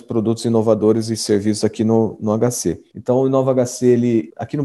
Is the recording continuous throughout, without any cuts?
no; 1 cut; at 2.9 s

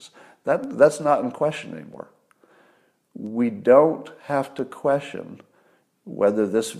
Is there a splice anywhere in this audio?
no; 0 cuts

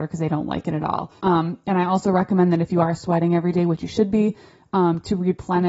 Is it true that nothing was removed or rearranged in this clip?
no; 1 cut; at 1.2 s

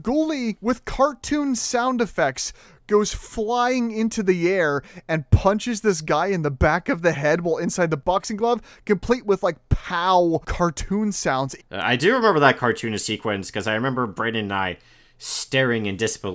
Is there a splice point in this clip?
yes; 1 cut; at 11.6 s

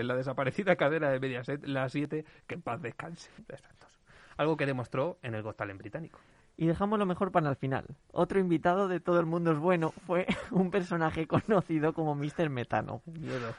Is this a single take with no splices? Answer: no; 1 cut; at 3.4 s

